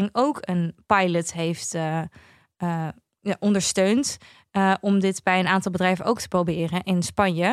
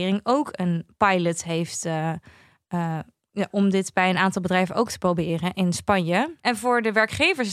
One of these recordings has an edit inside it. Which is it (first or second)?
second